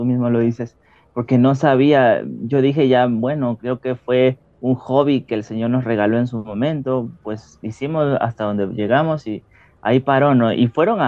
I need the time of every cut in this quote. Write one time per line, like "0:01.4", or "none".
none